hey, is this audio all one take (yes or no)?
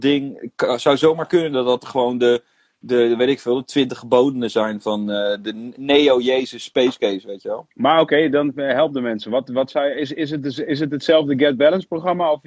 yes